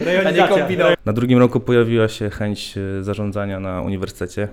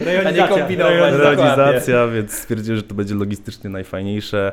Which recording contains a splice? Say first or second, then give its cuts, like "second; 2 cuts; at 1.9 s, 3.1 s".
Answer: first; 1 cut; at 0.9 s